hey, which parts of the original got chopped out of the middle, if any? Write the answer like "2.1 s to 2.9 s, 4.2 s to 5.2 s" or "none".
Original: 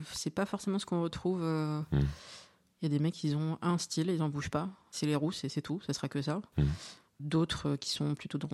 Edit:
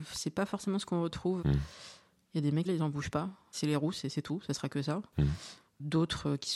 1.4 s to 1.9 s, 3.1 s to 4.0 s